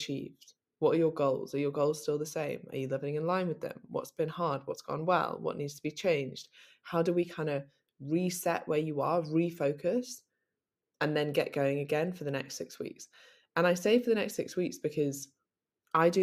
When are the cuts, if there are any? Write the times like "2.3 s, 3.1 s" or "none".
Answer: none